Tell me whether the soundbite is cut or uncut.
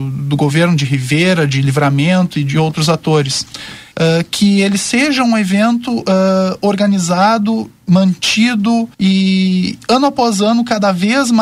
cut